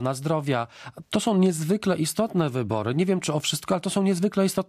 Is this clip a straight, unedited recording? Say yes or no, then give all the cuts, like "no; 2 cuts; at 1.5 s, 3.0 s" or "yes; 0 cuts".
no; 1 cut; at 1.0 s